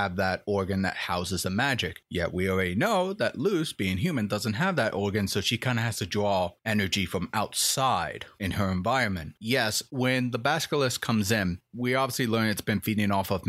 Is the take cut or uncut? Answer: cut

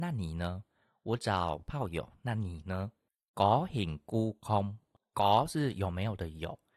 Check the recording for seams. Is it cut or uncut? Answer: uncut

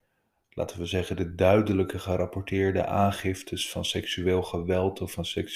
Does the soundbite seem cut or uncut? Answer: uncut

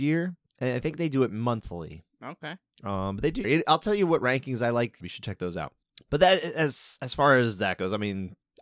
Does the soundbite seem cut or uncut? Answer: cut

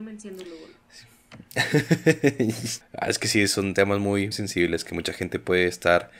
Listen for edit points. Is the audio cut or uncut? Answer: cut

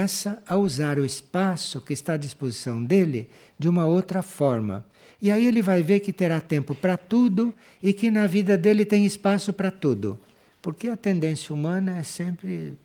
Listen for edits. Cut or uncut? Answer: cut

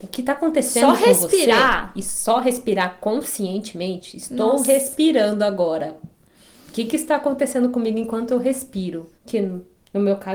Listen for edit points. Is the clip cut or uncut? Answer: cut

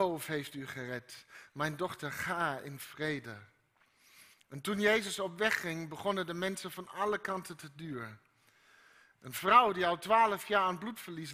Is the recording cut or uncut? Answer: cut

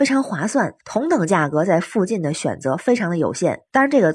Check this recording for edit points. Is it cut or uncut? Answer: uncut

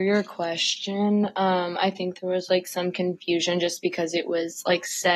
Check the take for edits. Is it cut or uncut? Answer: uncut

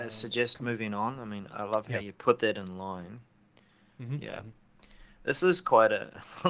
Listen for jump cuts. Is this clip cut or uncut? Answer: uncut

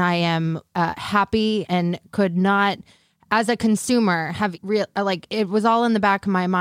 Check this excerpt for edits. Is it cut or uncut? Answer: cut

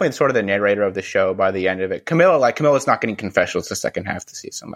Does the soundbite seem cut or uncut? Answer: uncut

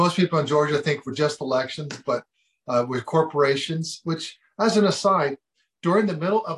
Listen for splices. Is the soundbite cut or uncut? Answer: uncut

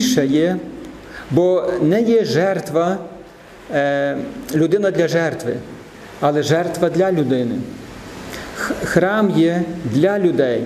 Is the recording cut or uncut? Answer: uncut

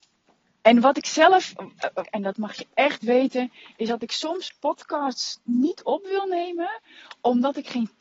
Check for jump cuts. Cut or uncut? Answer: cut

